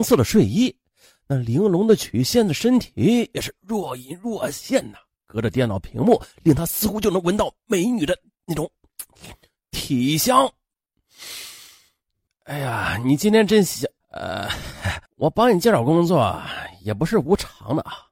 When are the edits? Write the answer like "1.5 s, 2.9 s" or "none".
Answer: 12.3 s, 14.0 s, 15.1 s

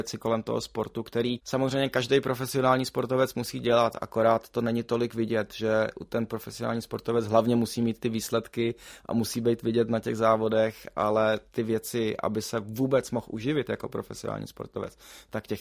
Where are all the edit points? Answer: none

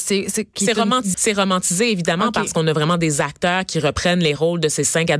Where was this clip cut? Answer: 1.1 s

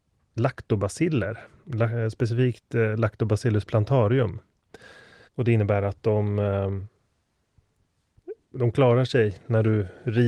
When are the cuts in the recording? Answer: 5.2 s, 8.5 s

